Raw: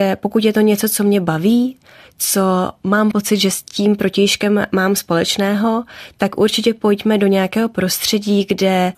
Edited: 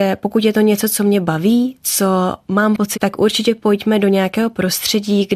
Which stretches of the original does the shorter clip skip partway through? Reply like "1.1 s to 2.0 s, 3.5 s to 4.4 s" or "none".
1.8 s to 2.1 s, 3.3 s to 6.1 s